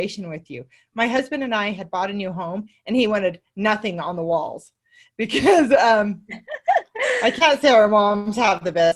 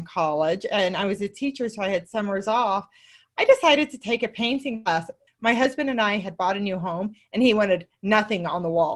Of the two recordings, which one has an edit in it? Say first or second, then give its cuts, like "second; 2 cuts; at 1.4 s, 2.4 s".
second; 1 cut; at 5.3 s